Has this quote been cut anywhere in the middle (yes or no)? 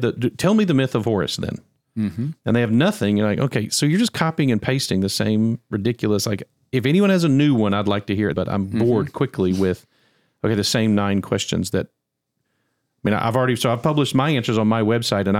yes